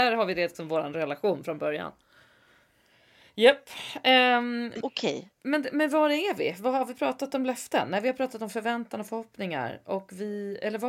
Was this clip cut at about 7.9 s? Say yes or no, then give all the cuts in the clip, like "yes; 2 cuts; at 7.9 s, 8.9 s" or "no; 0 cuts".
no; 1 cut; at 4.8 s